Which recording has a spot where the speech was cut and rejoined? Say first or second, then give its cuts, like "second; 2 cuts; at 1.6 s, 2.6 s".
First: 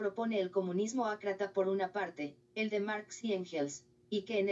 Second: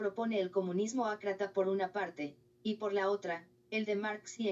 first; 1 cut; at 2.4 s